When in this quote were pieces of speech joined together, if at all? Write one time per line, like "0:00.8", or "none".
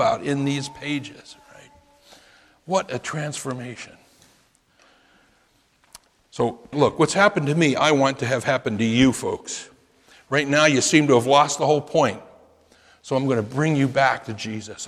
0:06.7